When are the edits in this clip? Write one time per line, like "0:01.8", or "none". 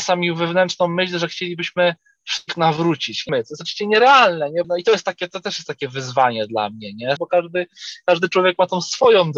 0:03.3
0:04.6
0:07.2

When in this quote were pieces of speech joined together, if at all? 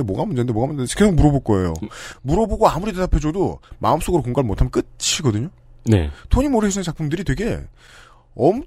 0:01.0

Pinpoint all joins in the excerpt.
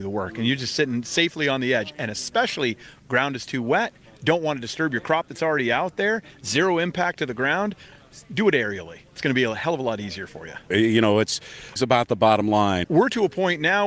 0:10.7
0:11.8
0:12.8

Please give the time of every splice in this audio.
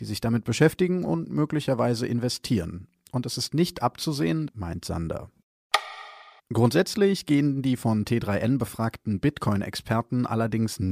0:04.5
0:06.4

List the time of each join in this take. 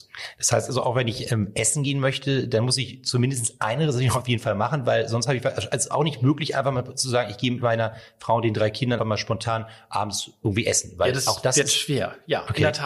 0:09.0

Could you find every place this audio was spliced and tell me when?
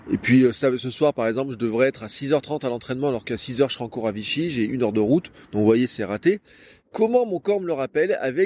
0:06.8

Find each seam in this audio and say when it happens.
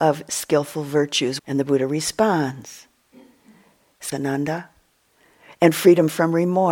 0:01.4
0:04.1

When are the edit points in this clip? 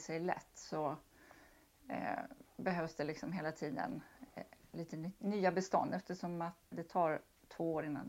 0:06.7

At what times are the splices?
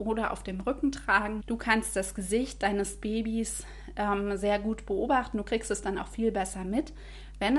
0:01.4

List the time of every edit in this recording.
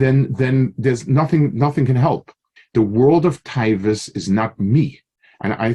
0:02.6

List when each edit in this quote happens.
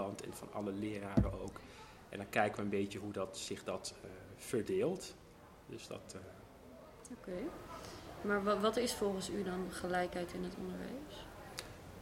none

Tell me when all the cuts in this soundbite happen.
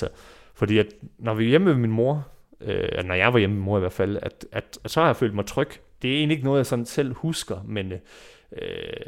0:06.0

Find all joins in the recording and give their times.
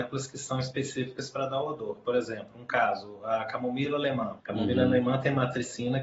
0:04.4

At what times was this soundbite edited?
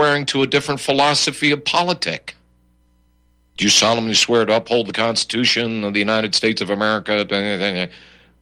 0:03.5

